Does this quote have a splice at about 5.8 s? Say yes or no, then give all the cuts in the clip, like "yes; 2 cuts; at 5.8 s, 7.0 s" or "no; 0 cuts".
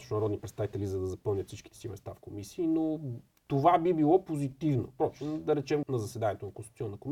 yes; 1 cut; at 5.8 s